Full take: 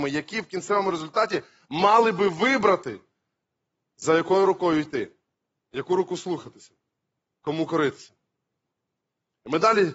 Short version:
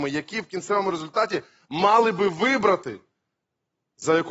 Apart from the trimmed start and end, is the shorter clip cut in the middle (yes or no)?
no